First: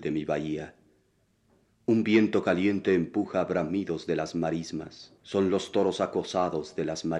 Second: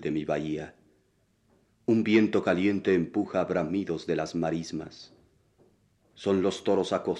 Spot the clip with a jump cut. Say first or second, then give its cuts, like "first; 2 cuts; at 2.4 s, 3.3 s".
first; 1 cut; at 5.2 s